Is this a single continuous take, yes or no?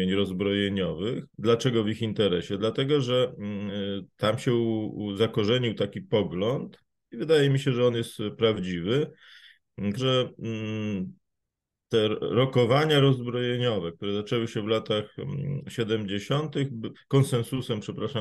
no